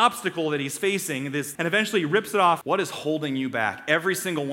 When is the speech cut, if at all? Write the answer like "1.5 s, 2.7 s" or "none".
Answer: 1.6 s, 2.6 s